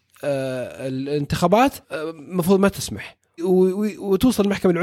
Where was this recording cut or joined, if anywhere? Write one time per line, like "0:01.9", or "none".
0:01.8
0:03.4